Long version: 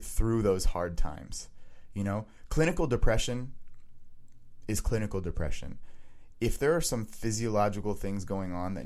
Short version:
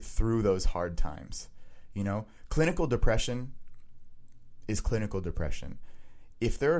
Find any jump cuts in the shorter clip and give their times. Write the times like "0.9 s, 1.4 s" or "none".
none